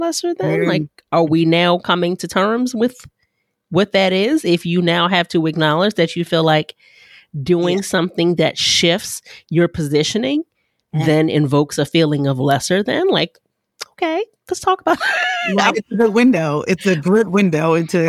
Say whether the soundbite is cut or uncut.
cut